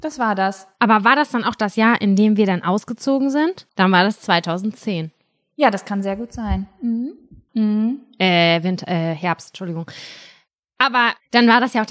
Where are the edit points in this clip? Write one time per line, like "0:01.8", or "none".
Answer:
0:03.7
0:07.5